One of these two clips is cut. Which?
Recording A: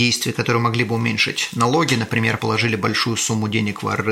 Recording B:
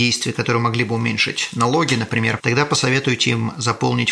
B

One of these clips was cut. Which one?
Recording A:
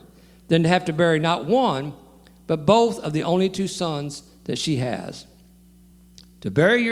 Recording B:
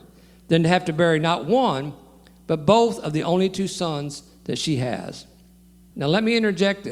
B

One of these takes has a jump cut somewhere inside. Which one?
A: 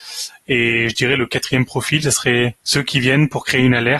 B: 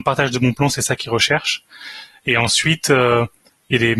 A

